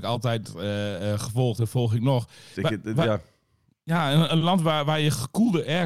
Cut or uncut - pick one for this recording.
cut